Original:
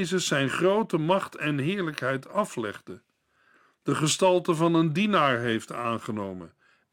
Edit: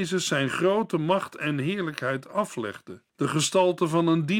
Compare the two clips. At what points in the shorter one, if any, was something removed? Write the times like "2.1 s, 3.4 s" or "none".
3.1 s